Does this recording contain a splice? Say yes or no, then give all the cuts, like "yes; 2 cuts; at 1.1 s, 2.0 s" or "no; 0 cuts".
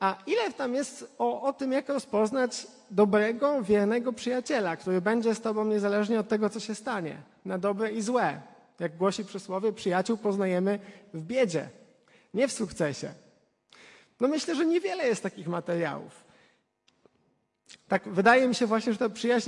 no; 0 cuts